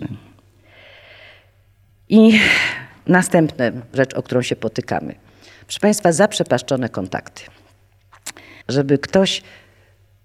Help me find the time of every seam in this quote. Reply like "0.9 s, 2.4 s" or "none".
8.6 s